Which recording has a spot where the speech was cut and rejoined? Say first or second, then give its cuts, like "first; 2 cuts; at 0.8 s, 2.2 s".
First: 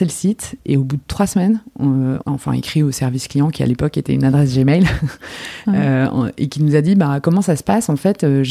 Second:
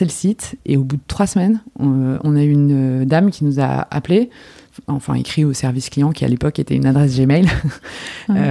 first; 1 cut; at 2.2 s